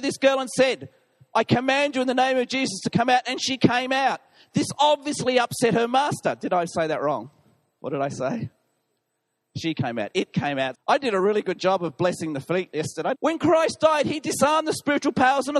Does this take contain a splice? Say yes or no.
yes